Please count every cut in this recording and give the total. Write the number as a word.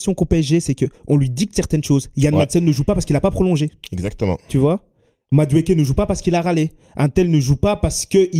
zero